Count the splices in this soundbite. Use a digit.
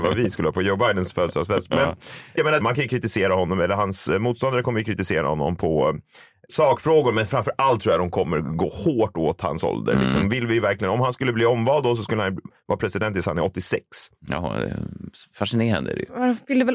1